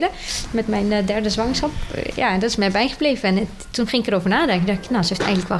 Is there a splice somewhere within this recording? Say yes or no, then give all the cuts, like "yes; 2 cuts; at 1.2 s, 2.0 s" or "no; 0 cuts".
no; 0 cuts